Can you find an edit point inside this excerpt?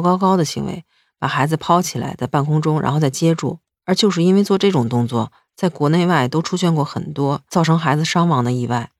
no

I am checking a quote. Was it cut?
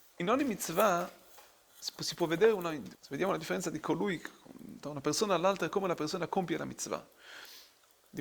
yes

